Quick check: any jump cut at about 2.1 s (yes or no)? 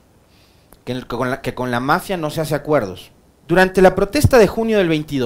no